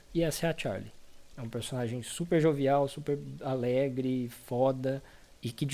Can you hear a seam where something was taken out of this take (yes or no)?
no